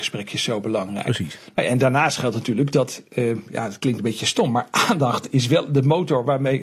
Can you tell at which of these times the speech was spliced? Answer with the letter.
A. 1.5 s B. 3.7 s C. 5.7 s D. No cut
D